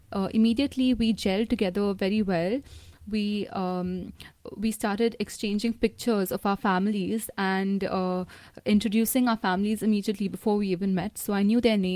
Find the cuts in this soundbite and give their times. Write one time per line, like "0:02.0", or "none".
none